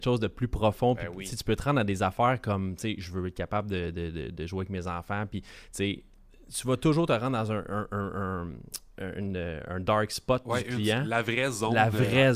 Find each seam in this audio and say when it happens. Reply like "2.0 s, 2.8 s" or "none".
none